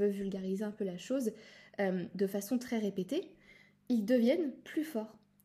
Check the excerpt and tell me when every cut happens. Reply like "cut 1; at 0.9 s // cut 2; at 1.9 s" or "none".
none